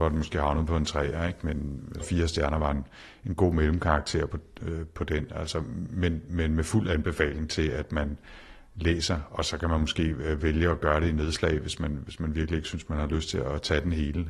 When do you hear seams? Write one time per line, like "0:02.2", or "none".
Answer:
0:02.0